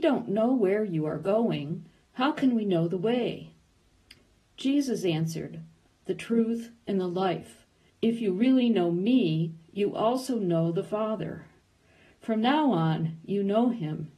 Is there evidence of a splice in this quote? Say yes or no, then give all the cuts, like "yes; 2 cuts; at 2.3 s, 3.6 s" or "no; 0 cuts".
yes; 2 cuts; at 6.0 s, 7.9 s